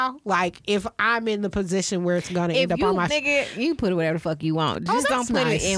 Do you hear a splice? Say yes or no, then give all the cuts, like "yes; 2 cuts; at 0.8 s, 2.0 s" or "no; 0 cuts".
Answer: yes; 1 cut; at 3.1 s